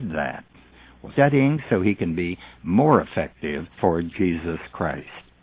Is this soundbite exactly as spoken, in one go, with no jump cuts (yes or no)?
no